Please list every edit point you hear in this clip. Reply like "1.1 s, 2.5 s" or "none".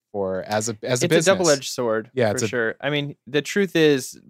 none